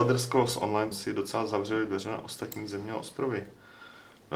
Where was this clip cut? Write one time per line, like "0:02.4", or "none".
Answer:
0:00.9